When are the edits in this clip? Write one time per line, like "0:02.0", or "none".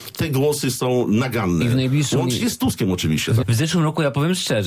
0:03.4